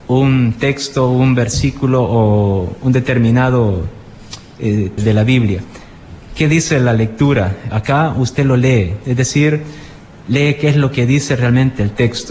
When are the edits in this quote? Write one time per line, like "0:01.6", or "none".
0:05.0